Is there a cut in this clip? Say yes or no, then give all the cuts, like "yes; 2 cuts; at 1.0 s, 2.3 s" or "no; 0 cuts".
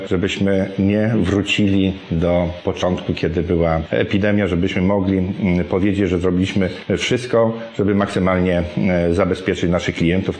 no; 0 cuts